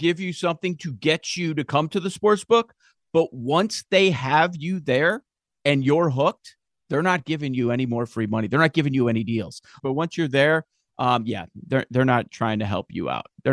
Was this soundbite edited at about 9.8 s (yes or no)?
yes